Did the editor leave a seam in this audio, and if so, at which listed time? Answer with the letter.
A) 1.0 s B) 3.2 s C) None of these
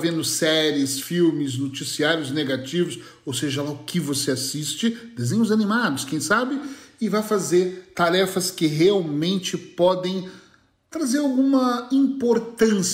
C